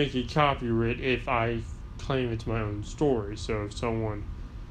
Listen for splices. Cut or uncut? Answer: uncut